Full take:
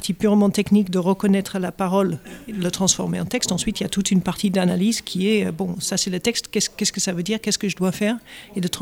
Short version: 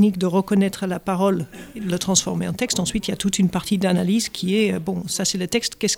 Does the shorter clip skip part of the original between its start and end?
no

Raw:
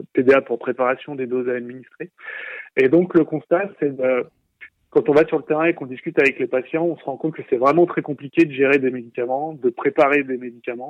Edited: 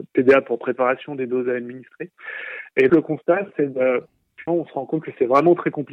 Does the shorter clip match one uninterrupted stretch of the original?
no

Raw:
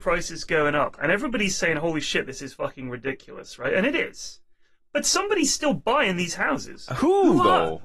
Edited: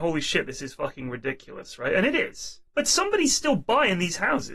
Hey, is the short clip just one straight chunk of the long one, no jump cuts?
no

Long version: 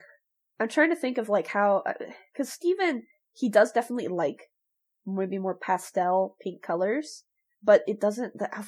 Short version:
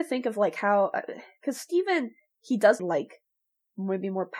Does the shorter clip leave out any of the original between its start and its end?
yes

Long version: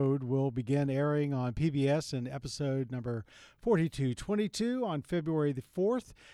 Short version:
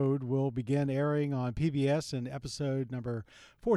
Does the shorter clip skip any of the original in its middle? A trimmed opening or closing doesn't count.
no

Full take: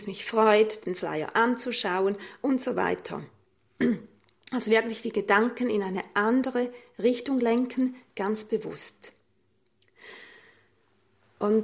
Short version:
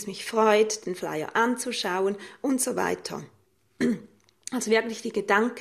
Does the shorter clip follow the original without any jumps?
yes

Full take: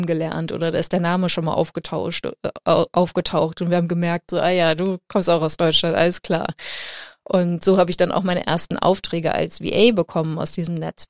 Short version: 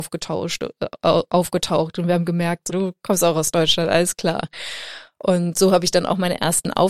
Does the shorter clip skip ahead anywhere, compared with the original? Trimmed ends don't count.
yes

